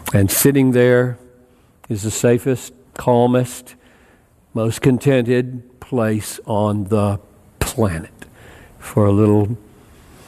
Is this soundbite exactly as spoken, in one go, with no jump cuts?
no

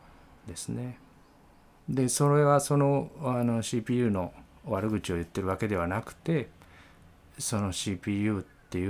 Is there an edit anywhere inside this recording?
yes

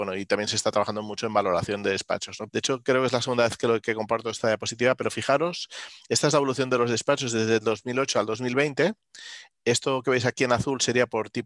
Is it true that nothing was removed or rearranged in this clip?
no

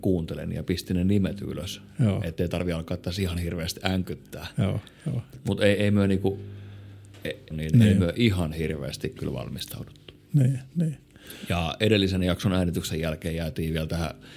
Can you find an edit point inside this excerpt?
yes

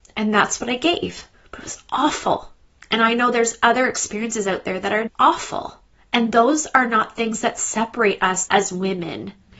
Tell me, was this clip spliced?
yes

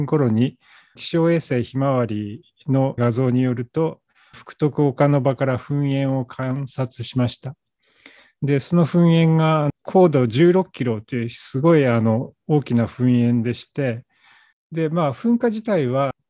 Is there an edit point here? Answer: no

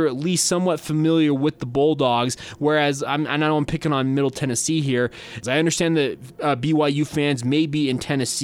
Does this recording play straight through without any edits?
no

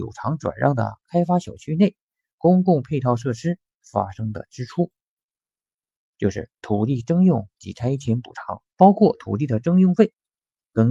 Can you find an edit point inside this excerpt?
yes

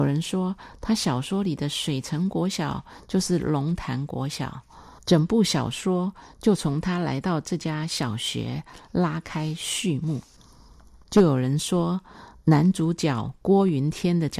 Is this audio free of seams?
no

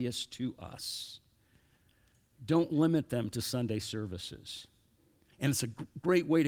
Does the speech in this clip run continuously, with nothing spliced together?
no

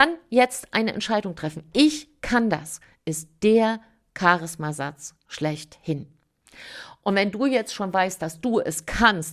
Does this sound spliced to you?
no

